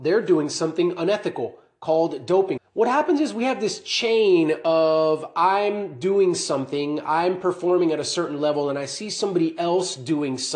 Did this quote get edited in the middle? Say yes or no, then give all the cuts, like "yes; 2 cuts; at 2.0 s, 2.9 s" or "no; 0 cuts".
yes; 1 cut; at 2.6 s